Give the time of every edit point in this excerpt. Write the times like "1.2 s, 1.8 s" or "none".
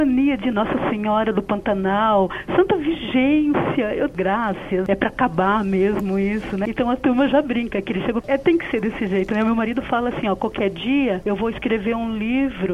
none

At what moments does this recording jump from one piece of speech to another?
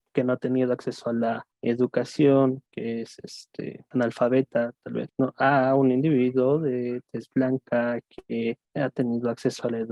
none

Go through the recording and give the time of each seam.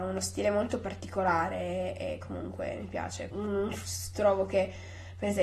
3.3 s

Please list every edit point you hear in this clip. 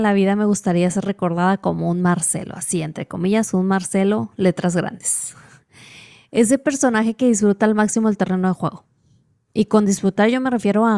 none

